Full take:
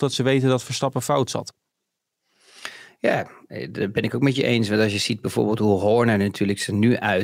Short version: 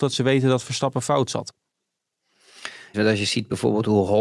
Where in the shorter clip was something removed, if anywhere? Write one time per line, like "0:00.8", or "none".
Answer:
0:02.9